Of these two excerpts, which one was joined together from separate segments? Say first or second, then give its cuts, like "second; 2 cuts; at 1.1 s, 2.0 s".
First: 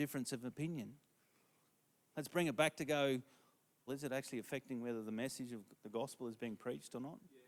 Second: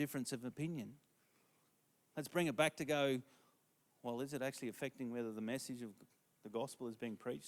first; 2 cuts; at 3.9 s, 5.7 s